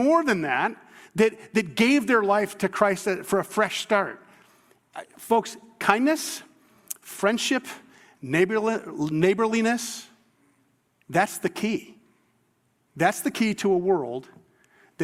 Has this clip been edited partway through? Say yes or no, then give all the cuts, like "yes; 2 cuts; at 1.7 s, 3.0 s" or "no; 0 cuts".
no; 0 cuts